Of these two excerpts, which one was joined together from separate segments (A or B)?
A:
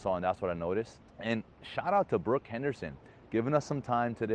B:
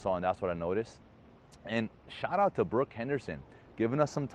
A